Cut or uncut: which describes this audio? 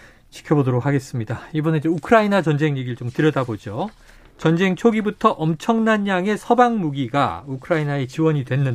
uncut